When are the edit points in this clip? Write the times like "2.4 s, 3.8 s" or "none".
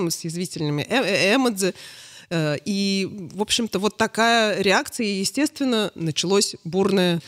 none